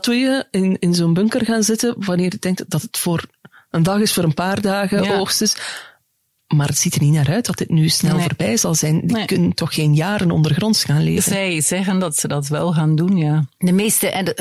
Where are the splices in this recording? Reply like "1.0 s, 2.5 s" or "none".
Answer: none